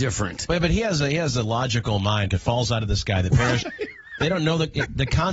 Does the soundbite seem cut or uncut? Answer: cut